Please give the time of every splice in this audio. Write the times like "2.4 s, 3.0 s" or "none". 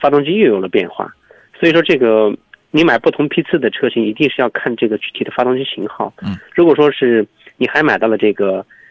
6.4 s